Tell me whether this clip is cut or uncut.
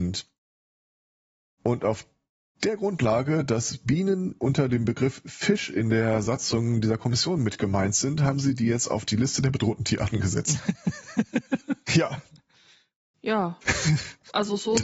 cut